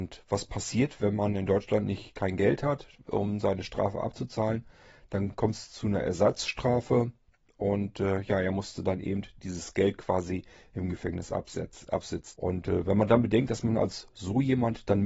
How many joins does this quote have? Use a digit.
1